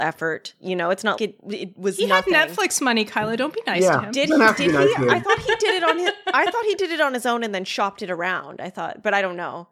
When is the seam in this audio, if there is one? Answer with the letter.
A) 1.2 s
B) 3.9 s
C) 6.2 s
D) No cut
A